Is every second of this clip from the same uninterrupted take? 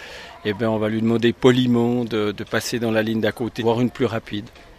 no; 1 cut; at 3.6 s

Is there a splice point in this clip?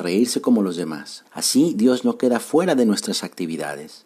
yes; 1 cut; at 1.2 s

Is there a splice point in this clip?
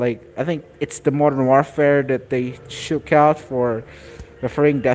no; 0 cuts

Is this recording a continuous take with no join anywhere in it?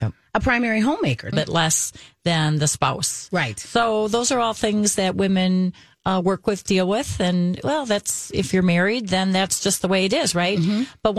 no; 1 cut; at 1.3 s

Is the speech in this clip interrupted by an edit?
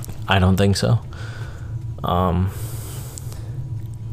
no; 0 cuts

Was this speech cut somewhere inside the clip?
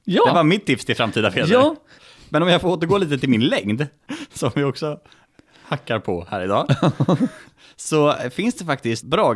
no; 0 cuts

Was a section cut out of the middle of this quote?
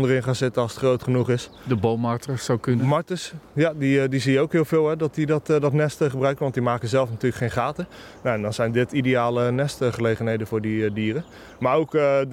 no; 0 cuts

